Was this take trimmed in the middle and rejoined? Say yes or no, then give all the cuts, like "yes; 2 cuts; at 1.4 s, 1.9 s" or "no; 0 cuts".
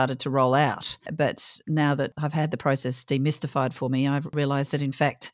no; 0 cuts